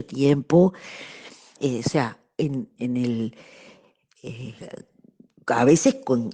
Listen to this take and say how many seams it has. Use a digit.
2